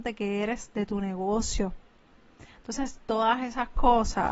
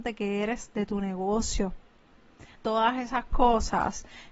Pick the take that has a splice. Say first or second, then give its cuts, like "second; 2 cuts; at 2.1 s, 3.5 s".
second; 1 cut; at 2.6 s